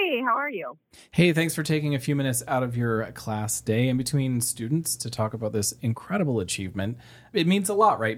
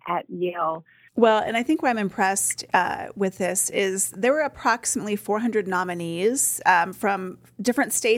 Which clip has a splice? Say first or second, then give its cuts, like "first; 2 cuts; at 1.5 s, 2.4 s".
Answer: second; 1 cut; at 1.1 s